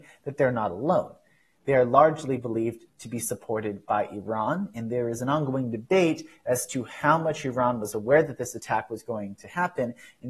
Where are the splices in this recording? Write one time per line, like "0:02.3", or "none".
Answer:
none

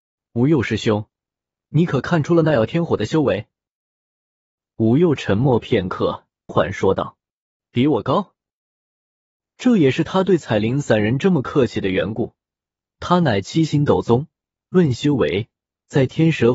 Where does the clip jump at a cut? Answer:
0:06.5

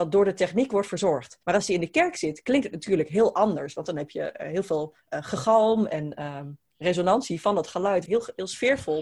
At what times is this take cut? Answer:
0:01.4
0:08.1

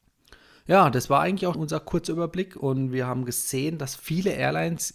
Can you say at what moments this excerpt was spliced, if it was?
0:01.5

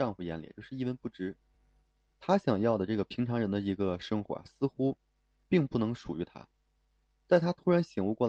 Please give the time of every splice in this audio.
none

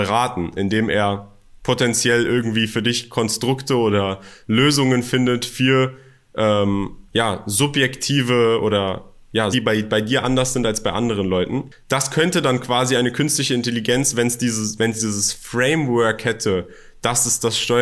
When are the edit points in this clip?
0:09.5

